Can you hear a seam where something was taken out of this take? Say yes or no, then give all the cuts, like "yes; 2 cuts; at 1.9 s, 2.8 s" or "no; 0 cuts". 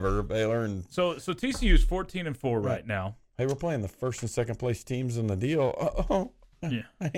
no; 0 cuts